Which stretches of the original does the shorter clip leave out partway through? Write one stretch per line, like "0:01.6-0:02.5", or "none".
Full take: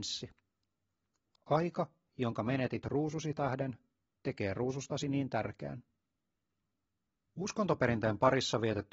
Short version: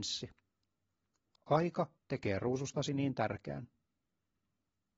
0:02.0-0:04.1